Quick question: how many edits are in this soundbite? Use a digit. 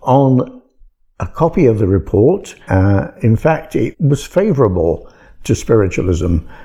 2